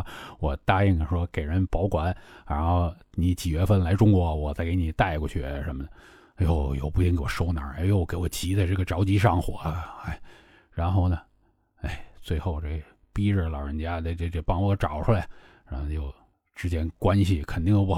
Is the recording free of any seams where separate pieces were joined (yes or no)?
no